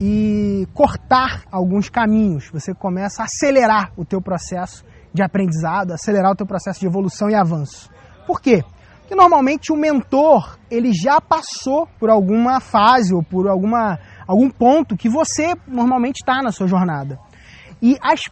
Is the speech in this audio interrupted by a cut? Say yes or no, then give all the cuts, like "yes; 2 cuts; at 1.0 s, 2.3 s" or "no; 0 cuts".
yes; 1 cut; at 12.0 s